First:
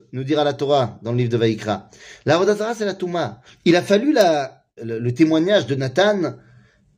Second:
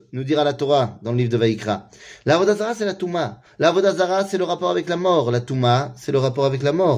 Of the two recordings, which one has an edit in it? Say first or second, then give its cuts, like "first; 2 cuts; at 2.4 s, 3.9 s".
first; 2 cuts; at 3.5 s, 4.8 s